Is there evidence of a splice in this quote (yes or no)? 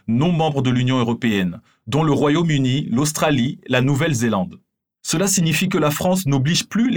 no